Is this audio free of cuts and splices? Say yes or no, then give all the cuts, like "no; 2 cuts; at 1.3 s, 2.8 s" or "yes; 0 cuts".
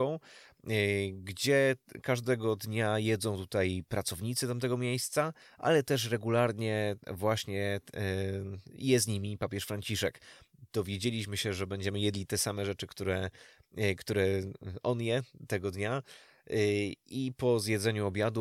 yes; 0 cuts